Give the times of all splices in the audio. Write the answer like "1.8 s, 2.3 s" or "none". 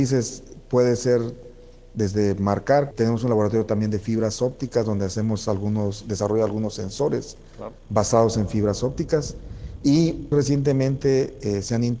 2.9 s, 10.3 s